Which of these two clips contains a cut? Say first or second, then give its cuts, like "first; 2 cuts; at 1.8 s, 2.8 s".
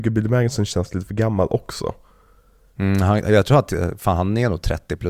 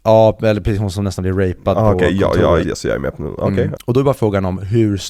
second; 2 cuts; at 2.6 s, 3.8 s